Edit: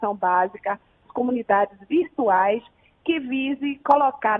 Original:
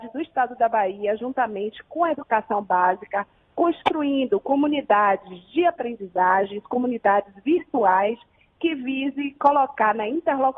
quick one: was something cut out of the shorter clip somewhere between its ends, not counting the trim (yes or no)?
yes